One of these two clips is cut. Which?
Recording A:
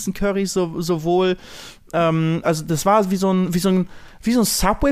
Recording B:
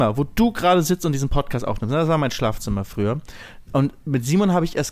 B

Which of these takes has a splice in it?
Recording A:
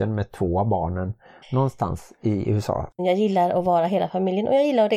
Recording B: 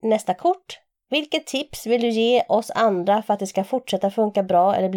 A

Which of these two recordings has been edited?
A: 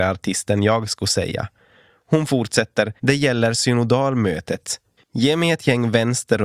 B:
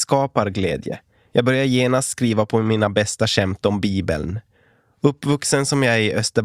A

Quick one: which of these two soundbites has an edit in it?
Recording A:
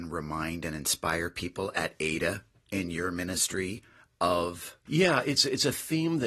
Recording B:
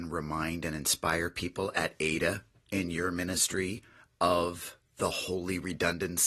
A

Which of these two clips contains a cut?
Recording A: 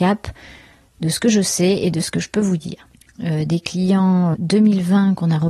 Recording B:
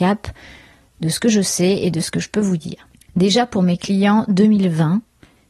A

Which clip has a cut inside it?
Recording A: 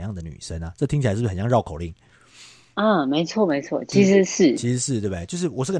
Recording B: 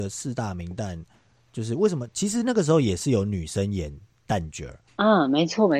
B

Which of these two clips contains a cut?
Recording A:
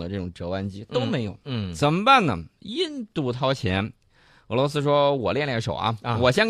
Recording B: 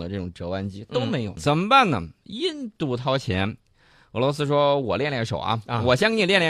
B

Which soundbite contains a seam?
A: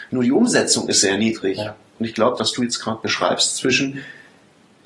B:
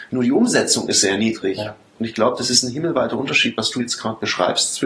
A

